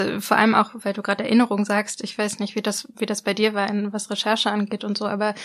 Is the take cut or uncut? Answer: uncut